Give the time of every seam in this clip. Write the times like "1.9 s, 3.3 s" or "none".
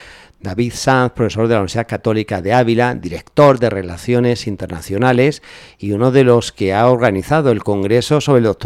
none